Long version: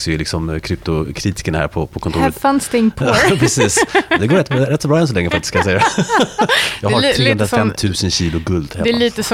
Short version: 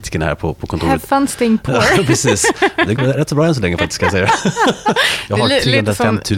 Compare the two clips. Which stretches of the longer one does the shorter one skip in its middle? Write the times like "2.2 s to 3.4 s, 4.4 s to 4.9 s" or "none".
4.3 s to 4.5 s